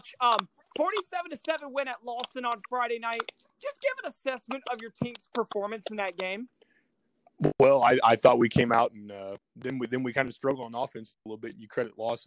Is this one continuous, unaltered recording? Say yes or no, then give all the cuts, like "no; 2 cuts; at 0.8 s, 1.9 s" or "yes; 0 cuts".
no; 1 cut; at 9.4 s